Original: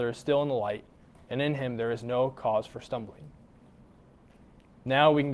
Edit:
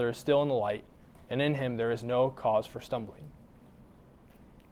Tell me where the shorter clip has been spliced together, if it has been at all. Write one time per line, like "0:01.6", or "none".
none